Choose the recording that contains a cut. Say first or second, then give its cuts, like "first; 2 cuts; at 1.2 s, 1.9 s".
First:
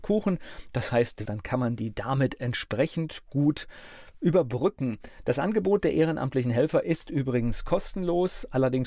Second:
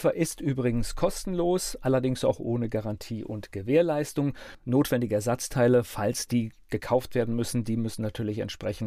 first; 1 cut; at 1.2 s